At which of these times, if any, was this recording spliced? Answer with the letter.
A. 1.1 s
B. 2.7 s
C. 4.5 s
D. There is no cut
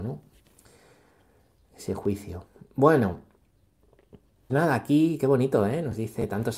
C